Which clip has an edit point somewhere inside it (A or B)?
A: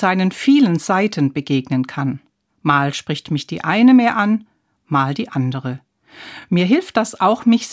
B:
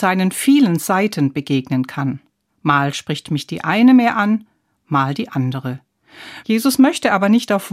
B